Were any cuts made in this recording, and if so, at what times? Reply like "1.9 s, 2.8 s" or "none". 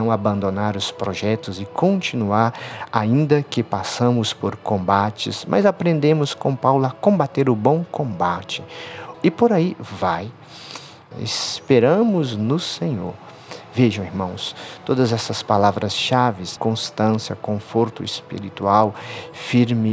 9.1 s, 11.1 s, 16.6 s